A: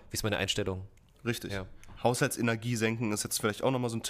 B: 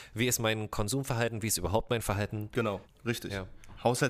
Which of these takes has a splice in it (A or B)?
B